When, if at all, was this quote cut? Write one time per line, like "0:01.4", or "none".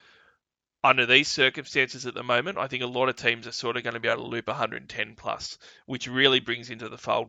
none